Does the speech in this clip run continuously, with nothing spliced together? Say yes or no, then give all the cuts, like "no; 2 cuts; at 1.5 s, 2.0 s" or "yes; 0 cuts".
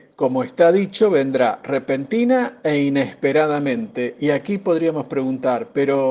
yes; 0 cuts